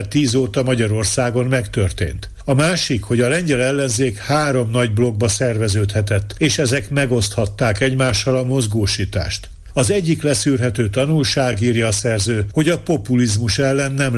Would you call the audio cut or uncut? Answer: uncut